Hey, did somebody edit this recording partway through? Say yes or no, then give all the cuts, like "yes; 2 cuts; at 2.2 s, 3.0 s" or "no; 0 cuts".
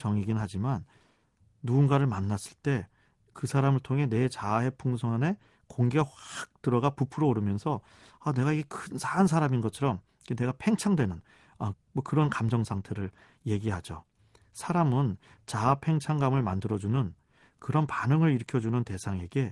yes; 1 cut; at 11.7 s